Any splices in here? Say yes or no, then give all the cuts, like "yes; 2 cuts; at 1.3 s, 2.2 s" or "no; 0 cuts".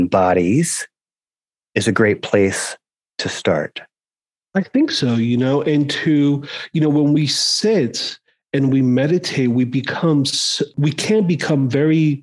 no; 0 cuts